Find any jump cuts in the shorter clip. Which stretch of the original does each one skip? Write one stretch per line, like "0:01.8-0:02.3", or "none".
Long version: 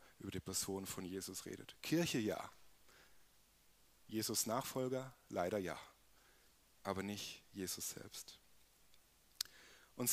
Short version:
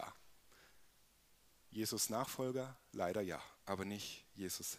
0:05.9-0:06.7